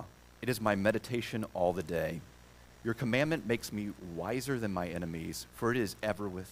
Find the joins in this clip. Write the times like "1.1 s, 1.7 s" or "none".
none